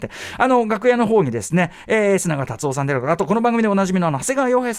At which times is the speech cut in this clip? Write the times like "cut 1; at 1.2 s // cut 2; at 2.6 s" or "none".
none